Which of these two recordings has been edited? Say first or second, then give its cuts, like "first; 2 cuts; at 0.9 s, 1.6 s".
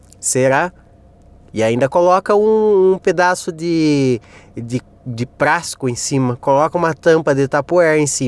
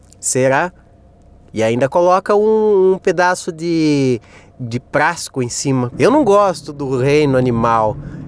second; 2 cuts; at 4.5 s, 5.9 s